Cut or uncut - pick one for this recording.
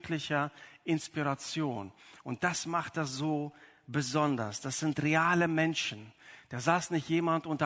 uncut